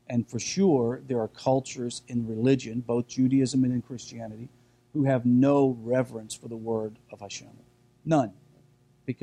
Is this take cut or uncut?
uncut